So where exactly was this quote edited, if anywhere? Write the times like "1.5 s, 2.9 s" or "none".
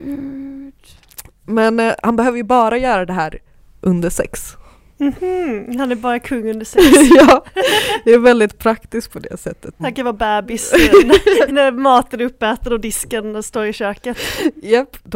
9.8 s, 11.5 s